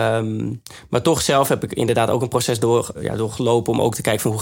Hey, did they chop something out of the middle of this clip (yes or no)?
yes